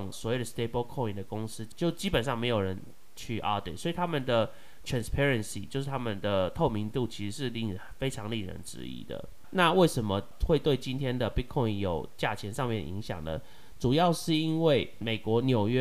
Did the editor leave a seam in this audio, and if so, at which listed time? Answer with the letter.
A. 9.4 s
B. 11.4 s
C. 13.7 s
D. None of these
D